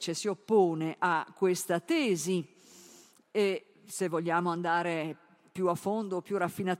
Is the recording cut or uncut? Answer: uncut